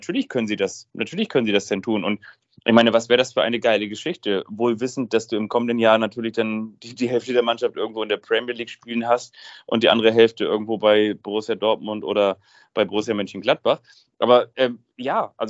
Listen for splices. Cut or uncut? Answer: uncut